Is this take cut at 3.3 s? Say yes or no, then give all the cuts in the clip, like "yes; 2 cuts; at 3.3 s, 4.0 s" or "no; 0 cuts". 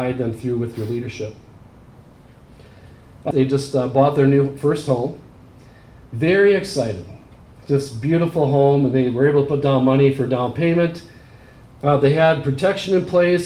yes; 1 cut; at 3.3 s